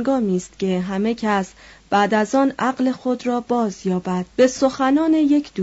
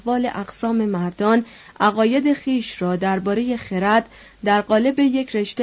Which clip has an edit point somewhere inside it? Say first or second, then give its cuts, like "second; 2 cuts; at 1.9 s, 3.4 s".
first; 1 cut; at 4.3 s